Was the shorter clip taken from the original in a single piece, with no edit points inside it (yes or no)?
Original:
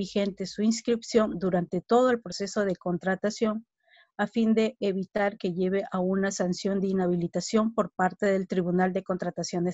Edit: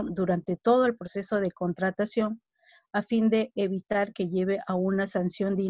yes